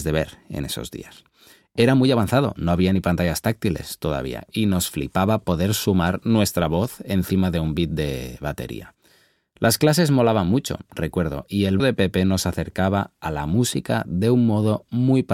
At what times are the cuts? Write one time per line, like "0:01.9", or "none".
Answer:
0:11.8